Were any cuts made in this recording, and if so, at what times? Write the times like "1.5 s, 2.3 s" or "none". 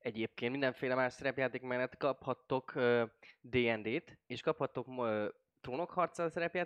none